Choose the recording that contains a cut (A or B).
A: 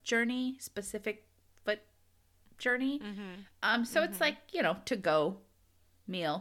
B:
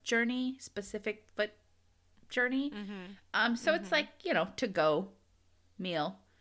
B